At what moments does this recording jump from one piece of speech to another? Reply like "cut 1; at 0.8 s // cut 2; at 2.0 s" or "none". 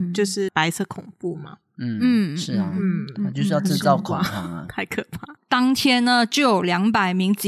cut 1; at 5.4 s